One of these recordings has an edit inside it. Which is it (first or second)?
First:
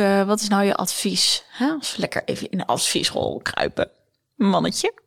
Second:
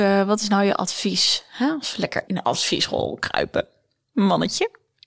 second